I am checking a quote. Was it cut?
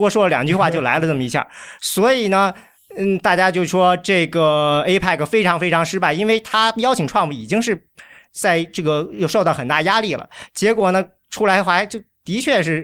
no; 0 cuts

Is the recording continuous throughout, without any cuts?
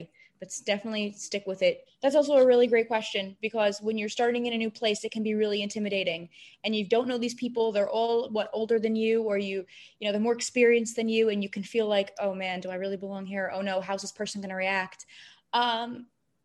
no; 1 cut; at 1.9 s

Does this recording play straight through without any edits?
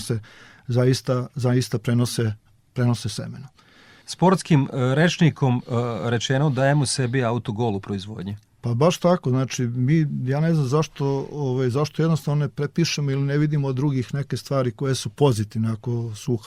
yes; 0 cuts

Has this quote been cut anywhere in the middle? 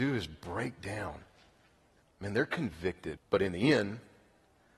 yes; 2 cuts; at 2.0 s, 3.2 s

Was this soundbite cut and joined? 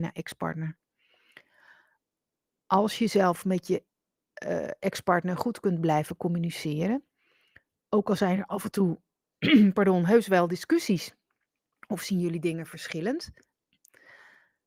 no; 0 cuts

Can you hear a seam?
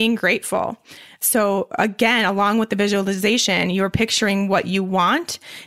no; 0 cuts

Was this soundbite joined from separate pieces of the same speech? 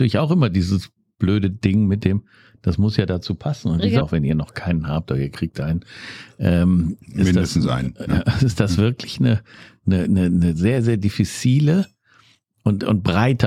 yes; 1 cut; at 4.0 s

